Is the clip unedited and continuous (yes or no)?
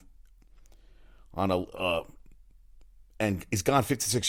yes